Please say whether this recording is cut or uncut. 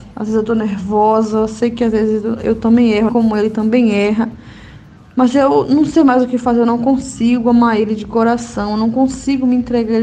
cut